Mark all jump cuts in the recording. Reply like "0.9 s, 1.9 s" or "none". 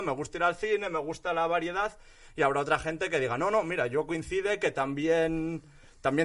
none